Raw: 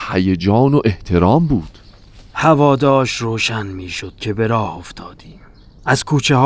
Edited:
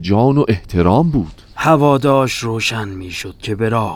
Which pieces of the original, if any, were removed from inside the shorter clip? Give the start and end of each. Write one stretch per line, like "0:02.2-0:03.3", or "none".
0:01.9-0:02.3

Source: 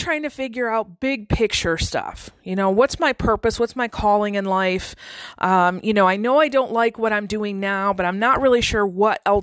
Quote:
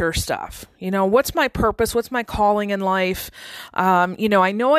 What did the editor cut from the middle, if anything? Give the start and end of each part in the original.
none

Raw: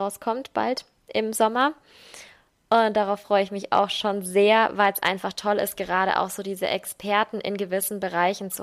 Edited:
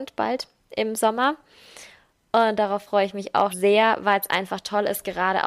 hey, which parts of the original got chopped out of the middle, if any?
0:03.9-0:04.2

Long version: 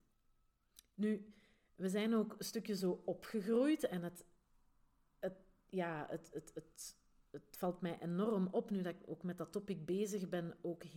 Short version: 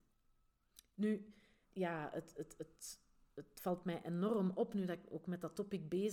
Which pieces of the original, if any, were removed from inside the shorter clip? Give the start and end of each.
0:01.6-0:05.6

